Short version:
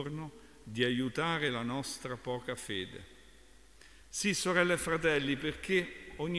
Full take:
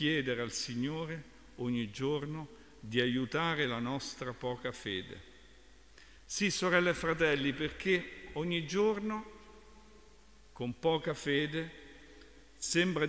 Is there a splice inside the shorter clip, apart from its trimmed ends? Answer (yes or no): no